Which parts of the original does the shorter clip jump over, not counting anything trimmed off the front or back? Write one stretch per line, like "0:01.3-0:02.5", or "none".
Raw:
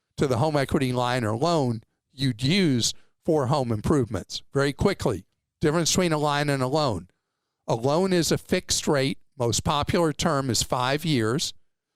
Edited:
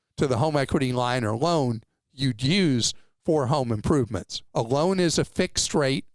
0:04.5-0:07.6